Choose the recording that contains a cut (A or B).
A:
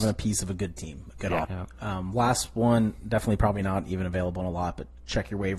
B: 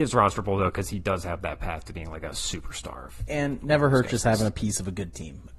A